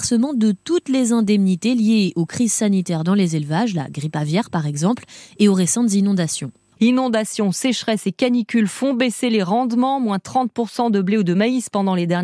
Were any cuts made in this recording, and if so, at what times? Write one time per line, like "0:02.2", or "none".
0:06.8